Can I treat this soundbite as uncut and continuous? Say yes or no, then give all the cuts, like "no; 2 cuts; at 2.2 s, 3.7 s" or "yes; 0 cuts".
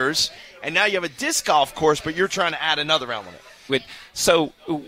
no; 1 cut; at 3.7 s